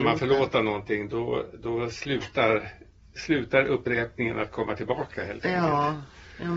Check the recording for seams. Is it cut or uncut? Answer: cut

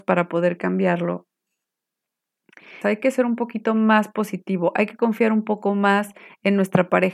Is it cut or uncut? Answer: cut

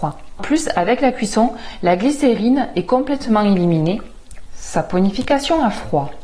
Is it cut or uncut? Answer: cut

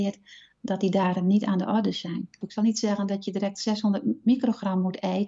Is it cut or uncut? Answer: cut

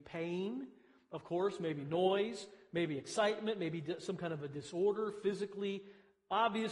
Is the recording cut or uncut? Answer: uncut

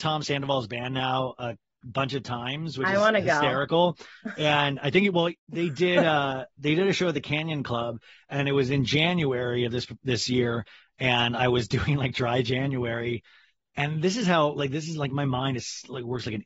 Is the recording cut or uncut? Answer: uncut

